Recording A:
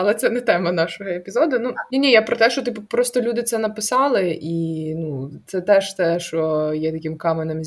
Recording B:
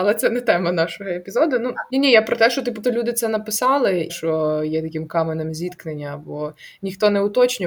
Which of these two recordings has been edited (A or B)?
B